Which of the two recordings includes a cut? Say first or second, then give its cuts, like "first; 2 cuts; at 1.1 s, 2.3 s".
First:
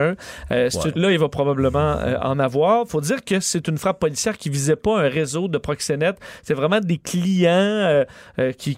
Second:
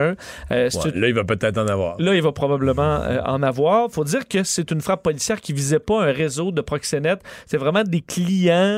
first; 1 cut; at 0.9 s